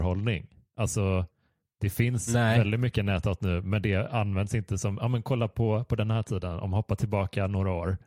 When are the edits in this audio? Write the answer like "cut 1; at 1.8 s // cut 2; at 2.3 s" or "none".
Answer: none

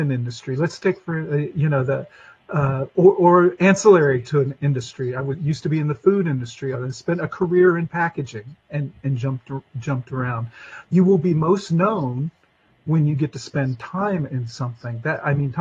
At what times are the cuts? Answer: cut 1; at 6.7 s

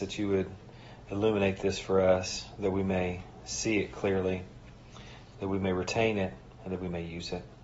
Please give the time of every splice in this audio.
none

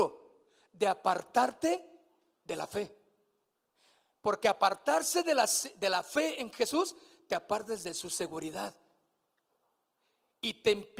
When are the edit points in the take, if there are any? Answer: none

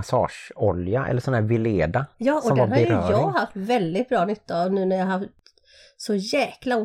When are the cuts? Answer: cut 1; at 2.1 s

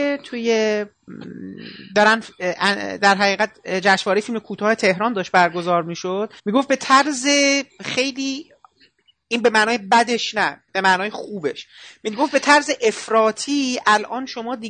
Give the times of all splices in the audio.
cut 1; at 6.4 s // cut 2; at 10.7 s

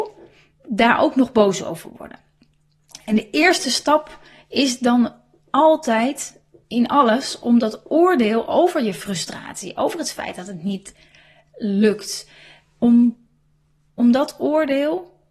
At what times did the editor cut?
none

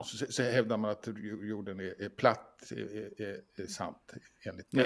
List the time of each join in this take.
none

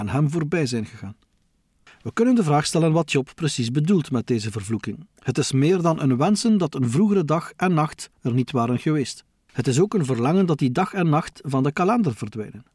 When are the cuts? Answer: cut 1; at 5.2 s

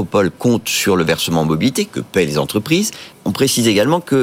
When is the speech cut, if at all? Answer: cut 1; at 3.1 s

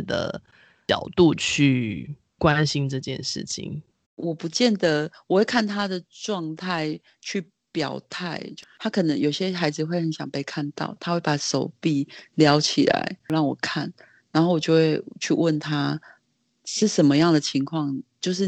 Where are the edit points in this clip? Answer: cut 1; at 4.0 s

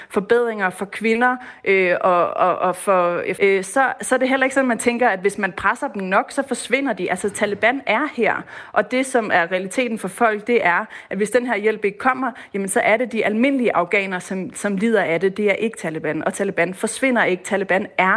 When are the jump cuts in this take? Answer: cut 1; at 3.3 s

